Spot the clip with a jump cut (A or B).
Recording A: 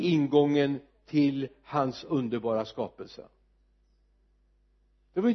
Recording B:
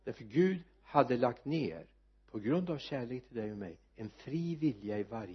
B